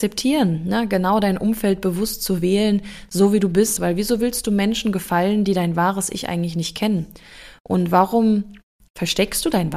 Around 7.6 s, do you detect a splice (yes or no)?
no